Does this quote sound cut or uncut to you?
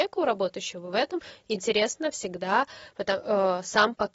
uncut